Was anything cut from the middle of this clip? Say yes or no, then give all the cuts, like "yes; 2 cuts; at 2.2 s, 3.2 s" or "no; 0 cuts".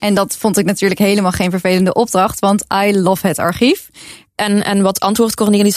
yes; 1 cut; at 4.3 s